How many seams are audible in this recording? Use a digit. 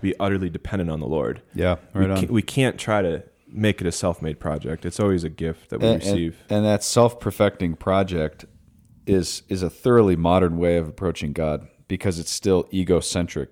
0